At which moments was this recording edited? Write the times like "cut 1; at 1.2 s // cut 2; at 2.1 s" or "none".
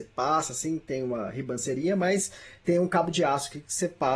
none